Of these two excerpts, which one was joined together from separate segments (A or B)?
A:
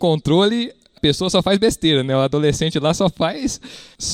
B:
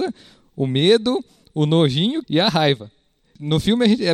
B